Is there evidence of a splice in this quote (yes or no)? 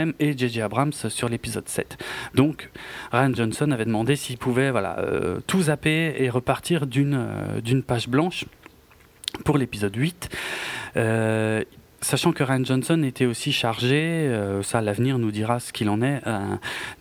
no